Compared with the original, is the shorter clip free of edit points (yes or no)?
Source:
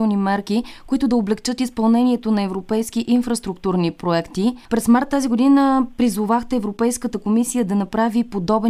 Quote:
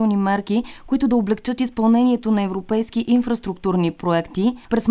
yes